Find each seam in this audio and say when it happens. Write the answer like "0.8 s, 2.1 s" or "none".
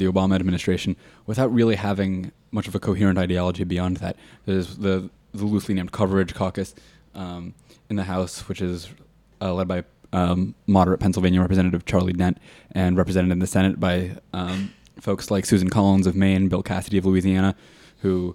4.4 s